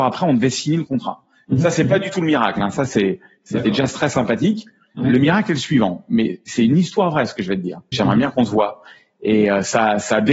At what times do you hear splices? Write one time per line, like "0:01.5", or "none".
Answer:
0:07.9